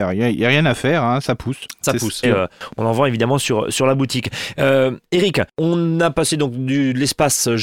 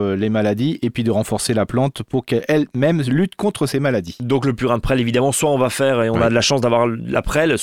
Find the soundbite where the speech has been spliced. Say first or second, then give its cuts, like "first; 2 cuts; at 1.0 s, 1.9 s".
first; 1 cut; at 2.2 s